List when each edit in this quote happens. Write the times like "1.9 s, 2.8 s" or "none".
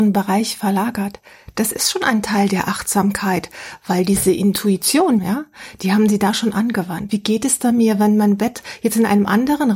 5.2 s, 7.1 s